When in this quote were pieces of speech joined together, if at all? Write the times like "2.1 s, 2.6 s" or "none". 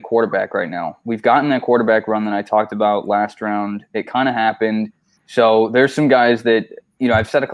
5.2 s